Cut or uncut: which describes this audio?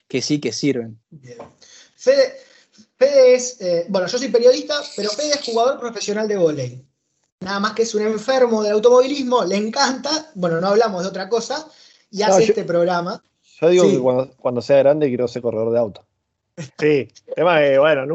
cut